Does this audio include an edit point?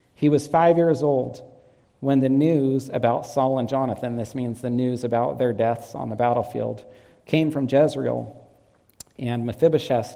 no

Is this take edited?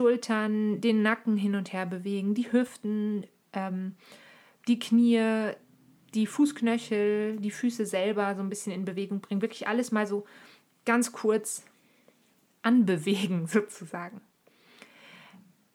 no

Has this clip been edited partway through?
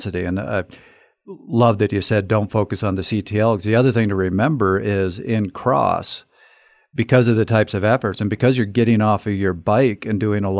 no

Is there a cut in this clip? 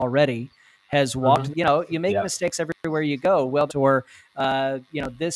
yes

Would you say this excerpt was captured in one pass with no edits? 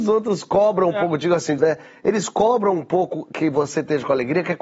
no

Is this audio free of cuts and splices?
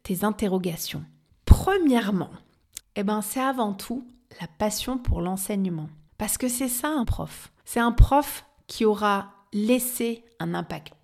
no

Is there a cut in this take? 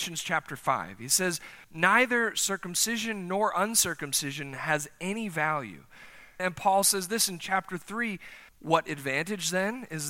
yes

